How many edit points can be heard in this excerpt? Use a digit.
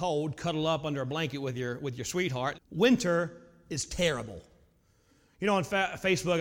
1